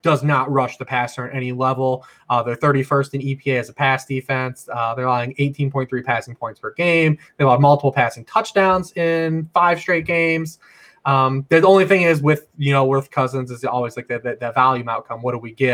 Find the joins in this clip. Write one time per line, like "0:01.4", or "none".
none